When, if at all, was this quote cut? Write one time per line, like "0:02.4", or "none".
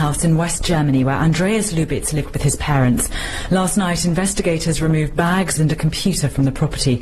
0:05.6